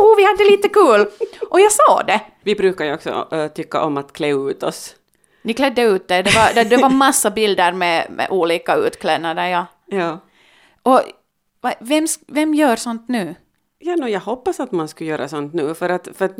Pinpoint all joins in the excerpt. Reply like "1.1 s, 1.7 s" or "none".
none